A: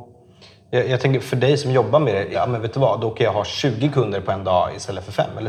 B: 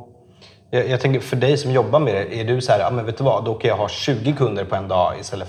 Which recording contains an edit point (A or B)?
A